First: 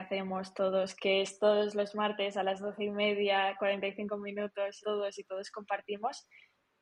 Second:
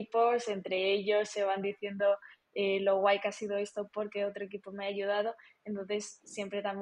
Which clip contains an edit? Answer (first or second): first